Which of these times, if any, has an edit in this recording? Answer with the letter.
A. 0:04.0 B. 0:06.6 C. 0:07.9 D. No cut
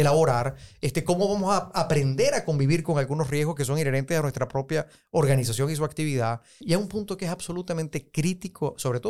B